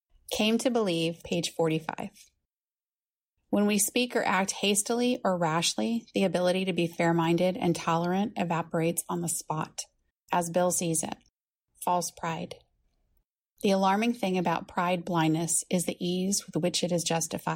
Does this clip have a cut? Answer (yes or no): yes